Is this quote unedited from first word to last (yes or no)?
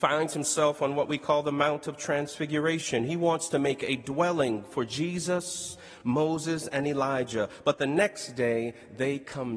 yes